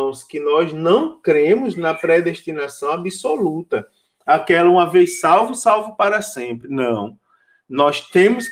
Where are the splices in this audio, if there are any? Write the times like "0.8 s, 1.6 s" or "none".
none